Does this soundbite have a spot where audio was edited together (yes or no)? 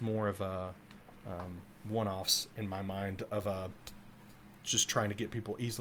no